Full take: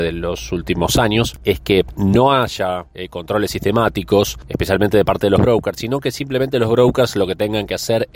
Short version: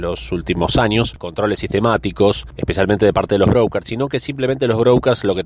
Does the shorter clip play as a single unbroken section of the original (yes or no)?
no